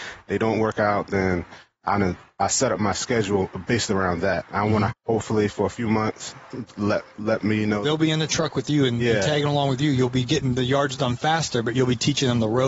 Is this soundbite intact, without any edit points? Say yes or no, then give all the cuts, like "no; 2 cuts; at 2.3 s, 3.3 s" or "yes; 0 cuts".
no; 1 cut; at 4.9 s